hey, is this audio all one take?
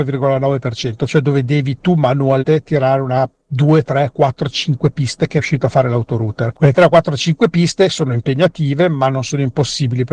yes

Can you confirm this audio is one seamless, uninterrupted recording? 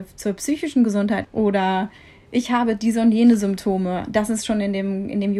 no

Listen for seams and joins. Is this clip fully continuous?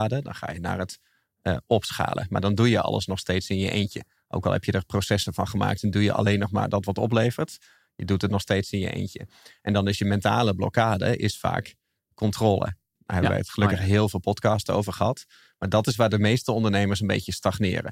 yes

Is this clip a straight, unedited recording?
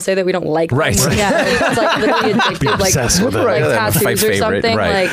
yes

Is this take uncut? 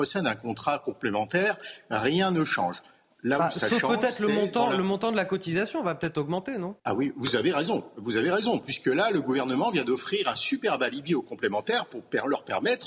no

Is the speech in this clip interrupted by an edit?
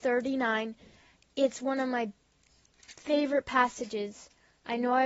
no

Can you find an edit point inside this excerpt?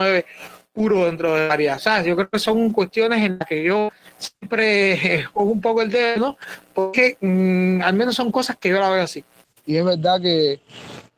no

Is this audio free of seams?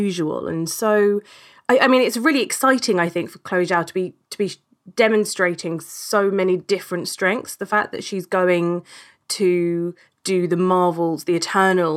yes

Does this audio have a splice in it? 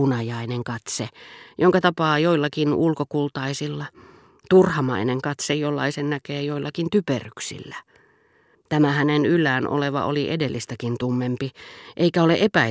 yes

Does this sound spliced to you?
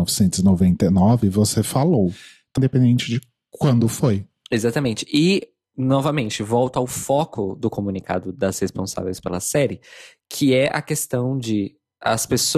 yes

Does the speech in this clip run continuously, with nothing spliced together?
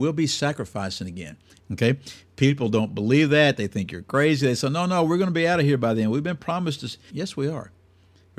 no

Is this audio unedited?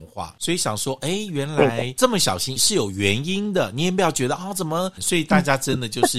no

